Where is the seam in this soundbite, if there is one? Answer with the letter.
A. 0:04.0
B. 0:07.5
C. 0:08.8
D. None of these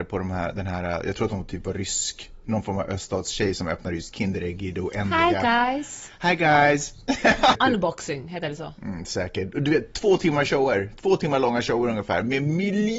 B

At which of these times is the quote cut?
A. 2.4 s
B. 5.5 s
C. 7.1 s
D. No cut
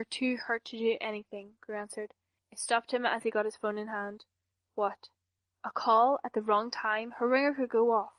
A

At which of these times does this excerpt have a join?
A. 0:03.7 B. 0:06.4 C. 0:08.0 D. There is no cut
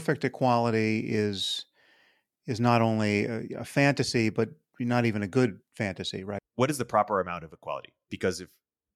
B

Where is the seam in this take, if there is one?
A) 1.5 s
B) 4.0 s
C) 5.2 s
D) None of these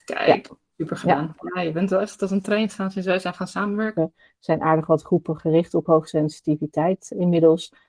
B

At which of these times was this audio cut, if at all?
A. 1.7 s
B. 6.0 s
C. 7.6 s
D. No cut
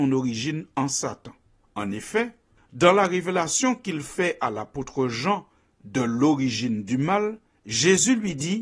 D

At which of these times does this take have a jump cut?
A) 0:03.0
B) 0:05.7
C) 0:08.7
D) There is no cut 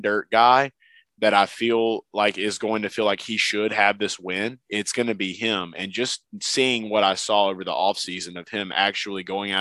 D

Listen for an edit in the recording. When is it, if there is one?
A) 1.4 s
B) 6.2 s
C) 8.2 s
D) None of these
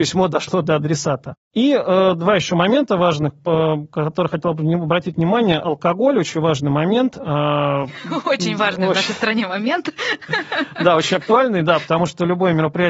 A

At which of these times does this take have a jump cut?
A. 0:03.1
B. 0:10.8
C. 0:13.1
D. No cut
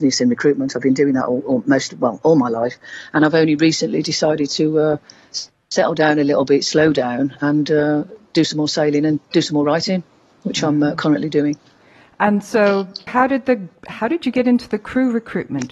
C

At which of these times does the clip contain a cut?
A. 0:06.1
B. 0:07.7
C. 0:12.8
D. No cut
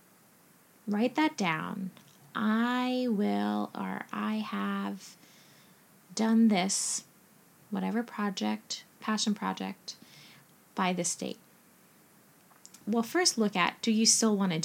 C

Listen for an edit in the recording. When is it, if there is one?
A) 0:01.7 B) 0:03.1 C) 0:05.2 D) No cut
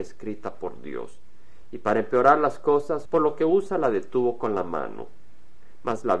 B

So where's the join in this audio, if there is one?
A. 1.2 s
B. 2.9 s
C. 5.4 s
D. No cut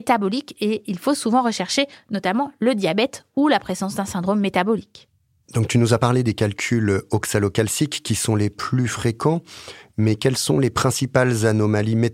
C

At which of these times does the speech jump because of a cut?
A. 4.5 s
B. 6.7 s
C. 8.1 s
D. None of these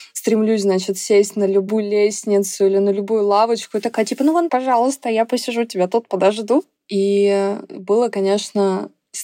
A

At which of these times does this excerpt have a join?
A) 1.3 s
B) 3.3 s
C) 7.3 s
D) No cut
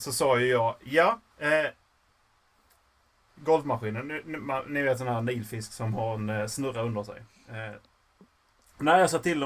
B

